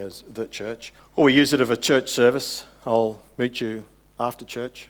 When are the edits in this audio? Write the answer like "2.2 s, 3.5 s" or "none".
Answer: 1.0 s